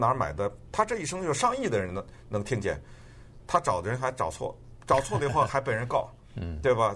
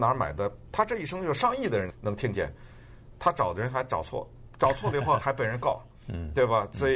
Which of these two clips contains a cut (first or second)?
second